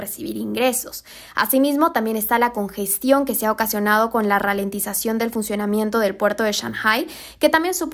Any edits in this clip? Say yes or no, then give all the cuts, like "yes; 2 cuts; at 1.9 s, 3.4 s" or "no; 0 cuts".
no; 0 cuts